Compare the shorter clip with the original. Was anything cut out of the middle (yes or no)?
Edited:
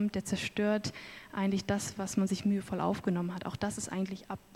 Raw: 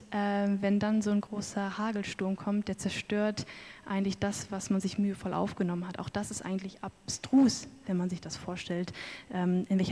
no